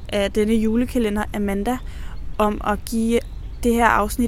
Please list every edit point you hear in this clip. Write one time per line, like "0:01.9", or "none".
none